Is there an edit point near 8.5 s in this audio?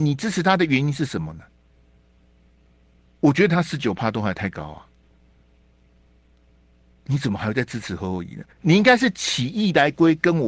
yes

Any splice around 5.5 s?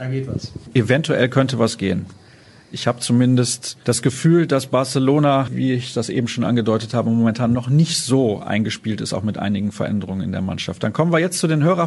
yes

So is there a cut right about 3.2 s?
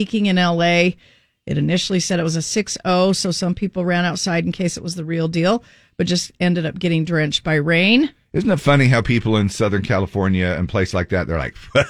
no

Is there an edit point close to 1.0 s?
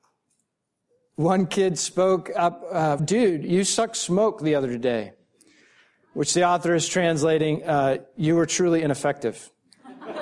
no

